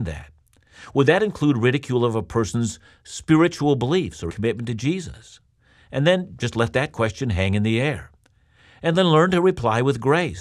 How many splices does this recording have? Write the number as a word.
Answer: one